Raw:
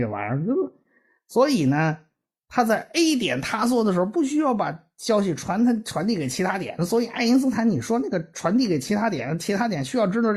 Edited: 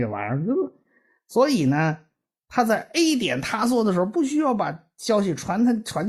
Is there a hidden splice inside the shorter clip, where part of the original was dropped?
no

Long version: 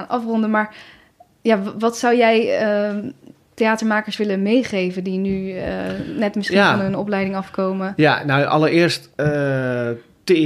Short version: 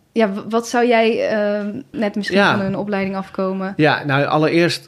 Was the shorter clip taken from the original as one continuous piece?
no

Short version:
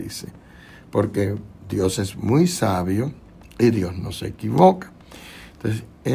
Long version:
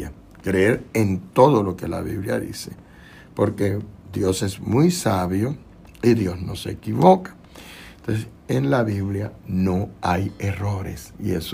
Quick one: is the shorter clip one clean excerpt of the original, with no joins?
yes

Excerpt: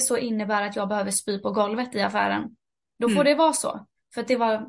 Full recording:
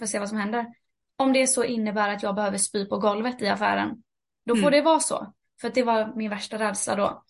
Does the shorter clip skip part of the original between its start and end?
no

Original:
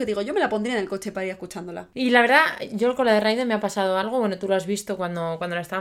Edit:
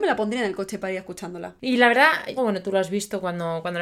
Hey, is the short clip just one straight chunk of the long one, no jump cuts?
no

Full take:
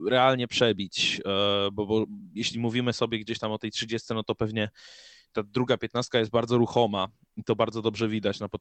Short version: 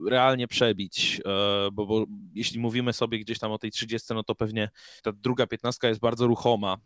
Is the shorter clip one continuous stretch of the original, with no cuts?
no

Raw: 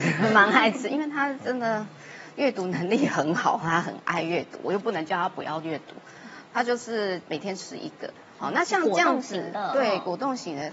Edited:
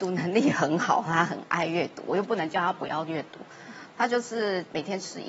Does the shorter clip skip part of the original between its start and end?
no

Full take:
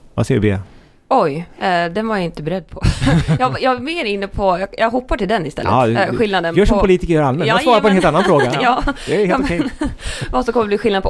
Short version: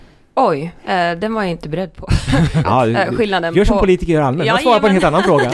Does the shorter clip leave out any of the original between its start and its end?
yes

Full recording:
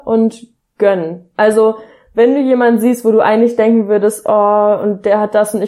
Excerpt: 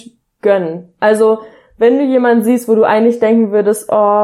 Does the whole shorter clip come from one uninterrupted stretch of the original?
yes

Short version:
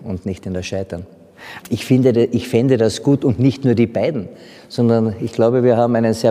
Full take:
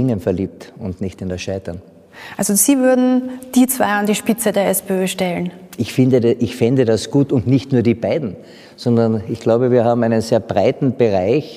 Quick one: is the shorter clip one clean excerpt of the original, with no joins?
no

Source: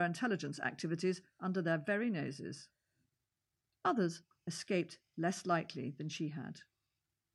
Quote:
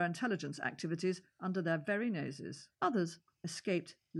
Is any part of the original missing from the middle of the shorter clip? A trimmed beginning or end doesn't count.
yes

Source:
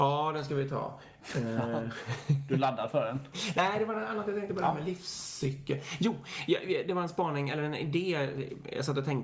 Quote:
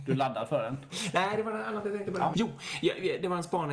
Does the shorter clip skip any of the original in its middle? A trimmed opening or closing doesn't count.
yes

